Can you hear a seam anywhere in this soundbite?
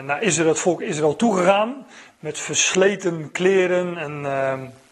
no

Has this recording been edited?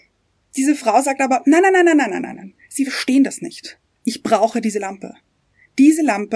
no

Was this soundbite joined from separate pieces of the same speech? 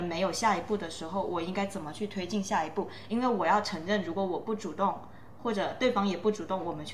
no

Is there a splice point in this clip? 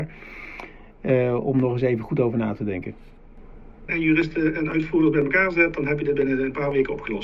yes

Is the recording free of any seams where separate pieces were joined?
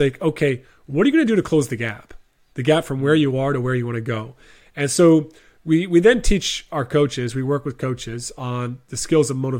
yes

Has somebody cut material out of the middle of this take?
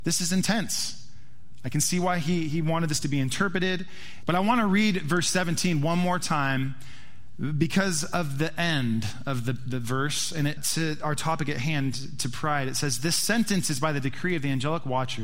yes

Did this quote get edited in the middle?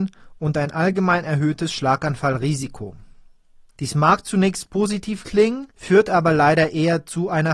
yes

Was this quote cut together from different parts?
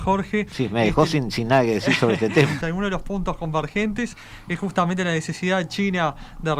yes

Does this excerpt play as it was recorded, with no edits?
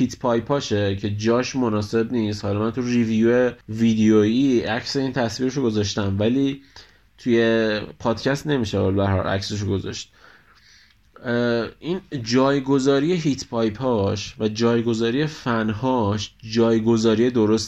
no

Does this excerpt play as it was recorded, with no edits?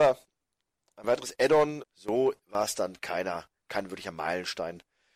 no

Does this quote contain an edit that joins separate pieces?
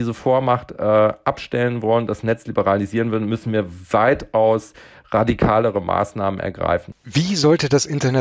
no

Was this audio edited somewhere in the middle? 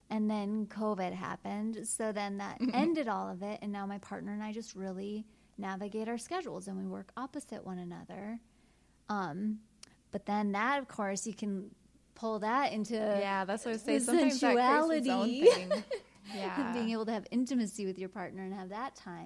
no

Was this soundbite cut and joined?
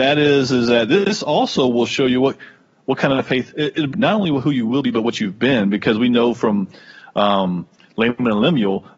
yes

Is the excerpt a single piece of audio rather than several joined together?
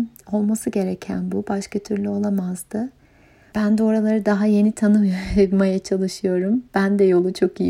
no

